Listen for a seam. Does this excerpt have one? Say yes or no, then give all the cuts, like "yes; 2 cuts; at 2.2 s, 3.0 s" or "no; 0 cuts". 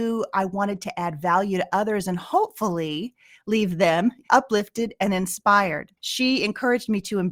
yes; 2 cuts; at 4.2 s, 6.0 s